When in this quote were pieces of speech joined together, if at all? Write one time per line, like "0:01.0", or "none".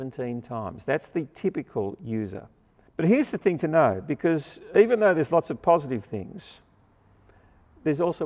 0:02.9